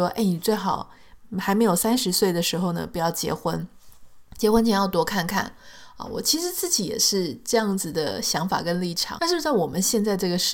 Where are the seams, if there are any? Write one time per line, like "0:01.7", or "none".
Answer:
0:09.2